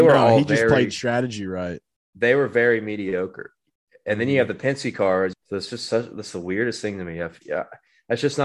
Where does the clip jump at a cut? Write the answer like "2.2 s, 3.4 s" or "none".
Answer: 5.3 s